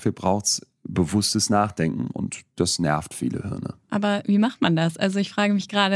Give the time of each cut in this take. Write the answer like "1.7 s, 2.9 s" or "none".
3.8 s